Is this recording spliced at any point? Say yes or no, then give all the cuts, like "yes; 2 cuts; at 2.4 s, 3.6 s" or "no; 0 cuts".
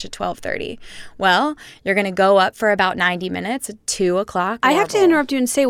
yes; 1 cut; at 4.6 s